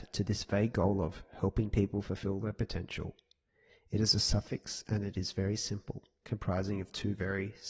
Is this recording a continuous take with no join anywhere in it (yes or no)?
yes